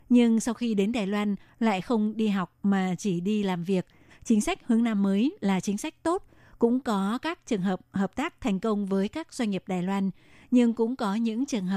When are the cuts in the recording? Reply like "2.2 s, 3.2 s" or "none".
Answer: 4.1 s